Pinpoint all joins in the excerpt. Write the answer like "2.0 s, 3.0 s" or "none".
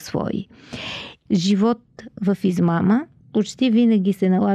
1.3 s